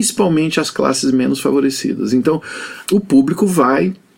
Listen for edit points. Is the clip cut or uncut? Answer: cut